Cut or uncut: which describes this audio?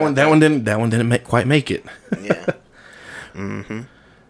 cut